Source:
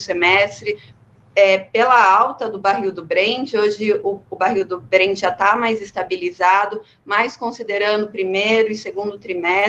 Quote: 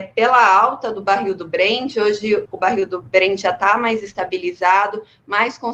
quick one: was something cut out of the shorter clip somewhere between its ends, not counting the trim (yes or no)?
yes